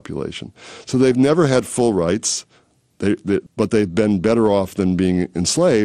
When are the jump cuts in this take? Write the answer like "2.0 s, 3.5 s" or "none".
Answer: 3.5 s

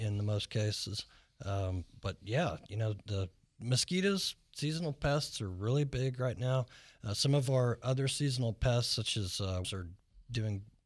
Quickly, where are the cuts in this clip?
9.6 s

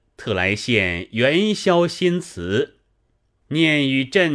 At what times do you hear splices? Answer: 3.4 s

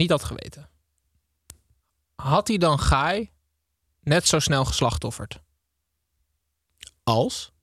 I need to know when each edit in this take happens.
none

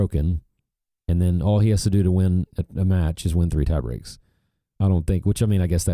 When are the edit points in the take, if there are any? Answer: none

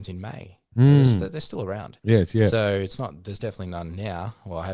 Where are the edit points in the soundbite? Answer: none

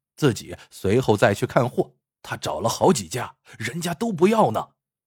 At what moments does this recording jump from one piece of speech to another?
2.1 s

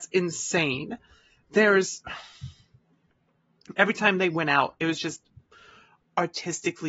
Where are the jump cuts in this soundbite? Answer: none

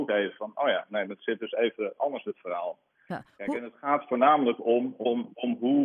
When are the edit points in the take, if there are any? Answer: none

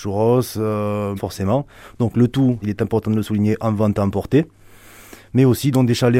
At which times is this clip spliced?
1.2 s, 2.6 s

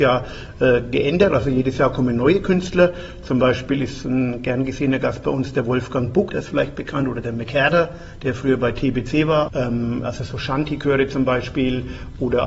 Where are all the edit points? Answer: 6.3 s, 9.5 s

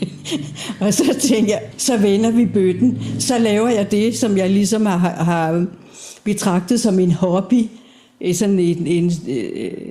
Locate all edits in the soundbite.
1.7 s

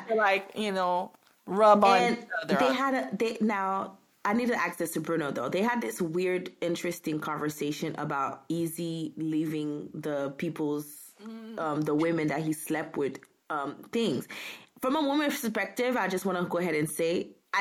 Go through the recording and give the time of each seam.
none

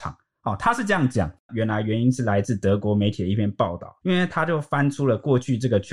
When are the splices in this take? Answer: 1.5 s

